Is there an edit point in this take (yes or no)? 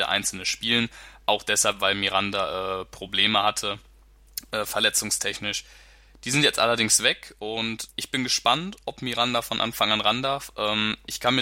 yes